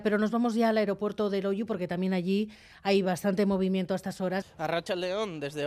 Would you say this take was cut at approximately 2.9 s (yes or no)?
no